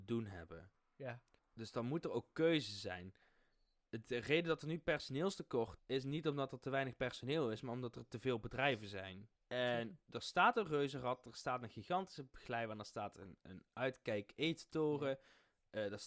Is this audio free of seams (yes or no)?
no